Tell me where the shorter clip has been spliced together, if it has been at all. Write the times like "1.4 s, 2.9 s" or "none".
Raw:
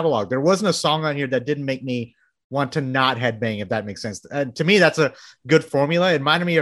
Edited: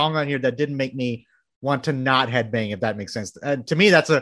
none

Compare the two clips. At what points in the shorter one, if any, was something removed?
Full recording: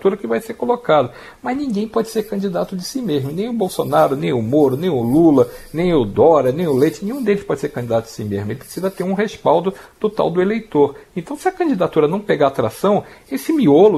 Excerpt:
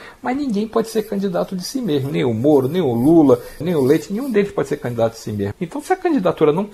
2.1 s, 3.6 s, 5.5 s

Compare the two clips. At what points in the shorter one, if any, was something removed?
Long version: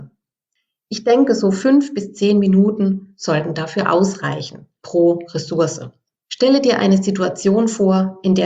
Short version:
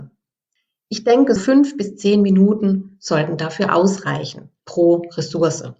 1.4 s

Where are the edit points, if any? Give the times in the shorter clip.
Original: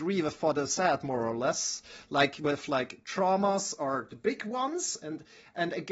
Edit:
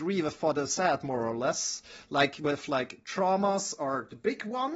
none

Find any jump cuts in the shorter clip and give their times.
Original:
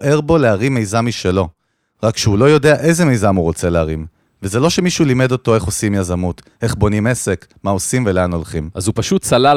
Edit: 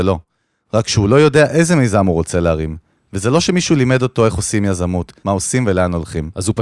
5.2 s

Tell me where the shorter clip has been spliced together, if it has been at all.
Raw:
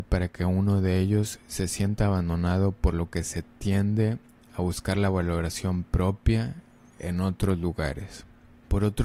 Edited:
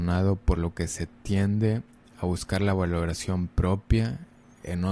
none

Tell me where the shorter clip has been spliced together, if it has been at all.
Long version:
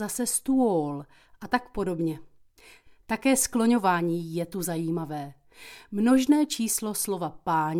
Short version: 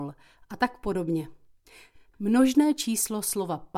2.1 s

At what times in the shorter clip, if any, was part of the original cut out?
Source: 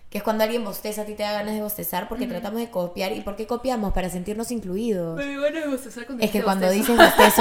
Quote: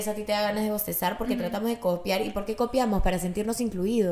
none

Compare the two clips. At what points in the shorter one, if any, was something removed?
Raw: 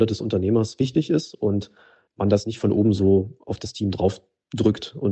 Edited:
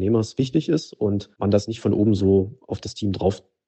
1.3 s

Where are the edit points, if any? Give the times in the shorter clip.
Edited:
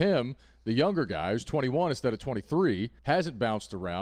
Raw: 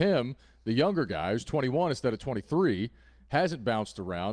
3.0 s

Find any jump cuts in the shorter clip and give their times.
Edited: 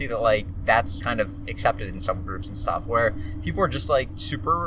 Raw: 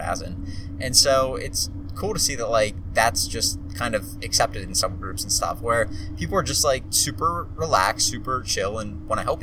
1.0 s

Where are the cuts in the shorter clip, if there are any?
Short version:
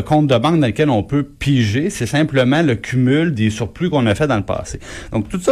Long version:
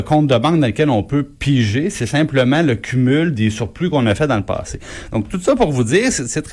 none

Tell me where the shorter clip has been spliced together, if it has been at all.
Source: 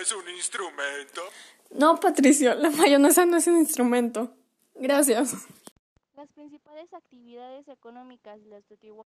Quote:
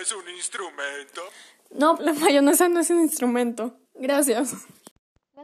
2.0 s, 3.9 s

